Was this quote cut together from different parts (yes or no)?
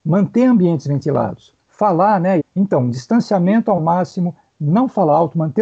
yes